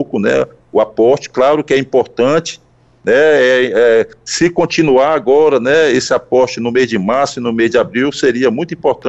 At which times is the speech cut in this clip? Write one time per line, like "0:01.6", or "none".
none